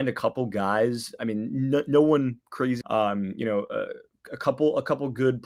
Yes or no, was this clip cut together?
yes